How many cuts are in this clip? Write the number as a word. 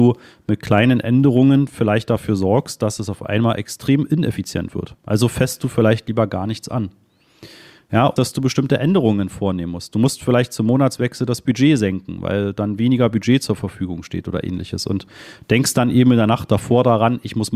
one